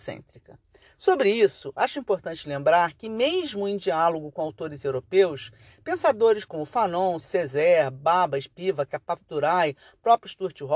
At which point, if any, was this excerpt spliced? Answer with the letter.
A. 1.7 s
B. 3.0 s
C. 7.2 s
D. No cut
C